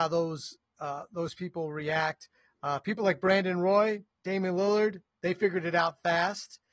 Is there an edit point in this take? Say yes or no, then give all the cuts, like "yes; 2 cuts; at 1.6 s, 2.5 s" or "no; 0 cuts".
yes; 1 cut; at 4.1 s